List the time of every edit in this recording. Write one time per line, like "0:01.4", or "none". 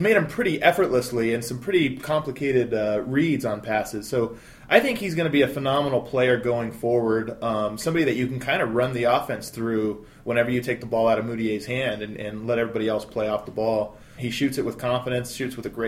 0:14.2